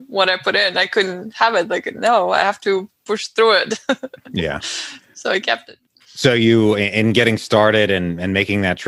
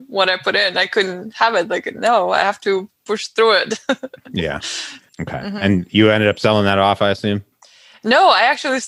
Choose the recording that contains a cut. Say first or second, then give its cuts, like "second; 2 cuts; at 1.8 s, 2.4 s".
second; 1 cut; at 5.1 s